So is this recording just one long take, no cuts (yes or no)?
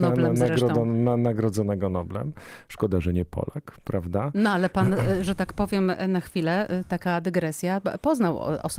yes